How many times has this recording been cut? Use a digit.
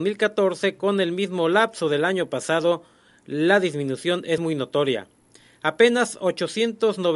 0